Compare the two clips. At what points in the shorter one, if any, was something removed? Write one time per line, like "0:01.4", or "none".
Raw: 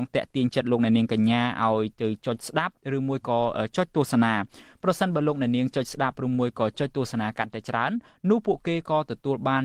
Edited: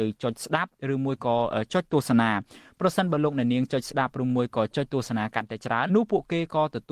0:05.9